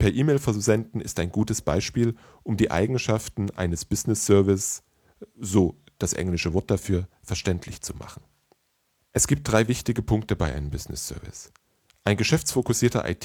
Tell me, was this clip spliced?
no; 0 cuts

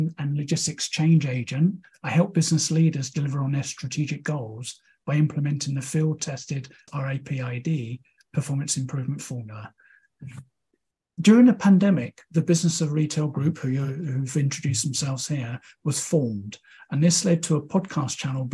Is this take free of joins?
yes; 0 cuts

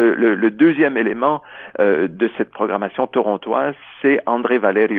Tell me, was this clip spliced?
no; 0 cuts

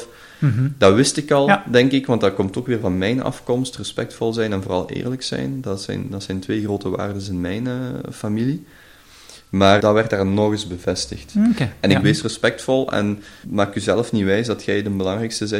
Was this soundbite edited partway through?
yes; 3 cuts; at 9.8 s, 12.0 s, 13.4 s

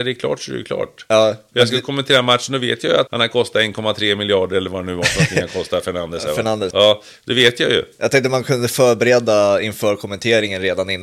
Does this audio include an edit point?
yes; 2 cuts; at 3.1 s, 6.7 s

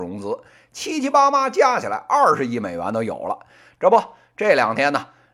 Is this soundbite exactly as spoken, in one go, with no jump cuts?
no; 1 cut; at 3.8 s

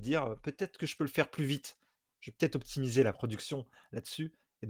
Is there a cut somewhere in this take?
no; 0 cuts

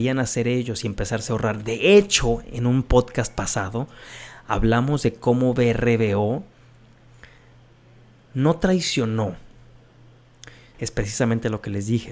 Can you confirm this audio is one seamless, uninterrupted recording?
no; 1 cut; at 10.7 s

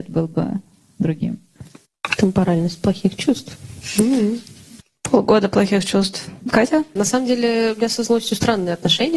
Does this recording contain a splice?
no; 0 cuts

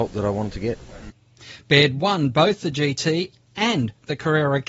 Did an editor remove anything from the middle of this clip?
no; 0 cuts

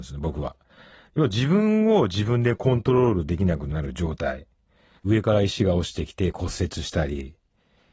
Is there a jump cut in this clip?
yes; 1 cut; at 5.0 s

